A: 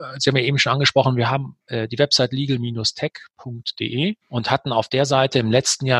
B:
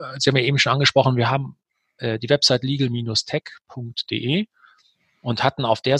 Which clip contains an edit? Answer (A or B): A